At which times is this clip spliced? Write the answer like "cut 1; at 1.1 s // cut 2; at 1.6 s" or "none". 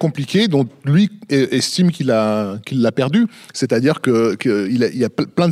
none

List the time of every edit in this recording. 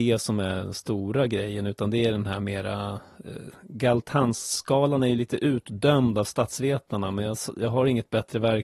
none

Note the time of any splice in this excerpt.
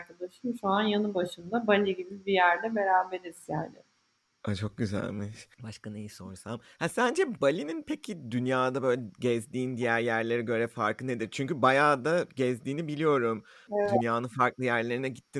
cut 1; at 5.5 s

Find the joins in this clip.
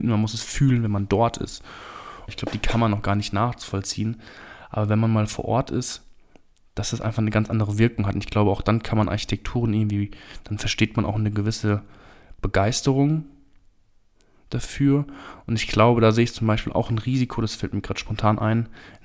cut 1; at 2.3 s

